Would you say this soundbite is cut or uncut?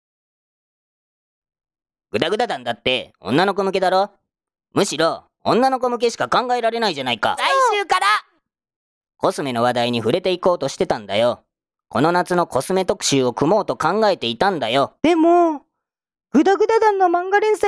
cut